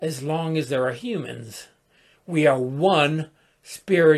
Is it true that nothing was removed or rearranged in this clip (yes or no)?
yes